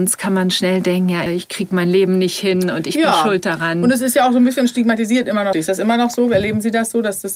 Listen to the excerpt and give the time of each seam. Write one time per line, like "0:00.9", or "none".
0:01.3
0:05.5